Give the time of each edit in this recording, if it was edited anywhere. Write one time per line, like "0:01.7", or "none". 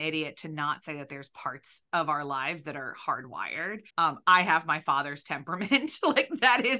0:03.9